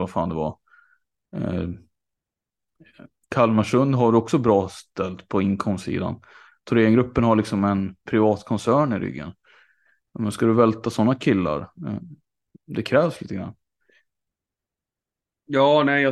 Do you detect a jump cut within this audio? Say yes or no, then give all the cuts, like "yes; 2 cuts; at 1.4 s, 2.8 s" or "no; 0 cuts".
no; 0 cuts